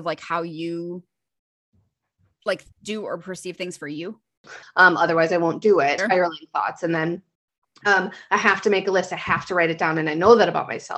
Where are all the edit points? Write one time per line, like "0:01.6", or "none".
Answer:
0:02.7
0:04.6
0:06.0